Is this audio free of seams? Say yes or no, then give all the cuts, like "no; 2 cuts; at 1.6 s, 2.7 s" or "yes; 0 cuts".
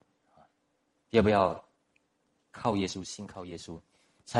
yes; 0 cuts